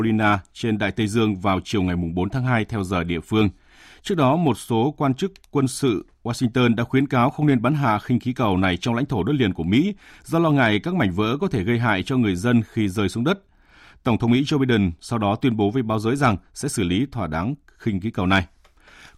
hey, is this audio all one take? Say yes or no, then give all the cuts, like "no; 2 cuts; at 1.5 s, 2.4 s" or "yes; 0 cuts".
yes; 0 cuts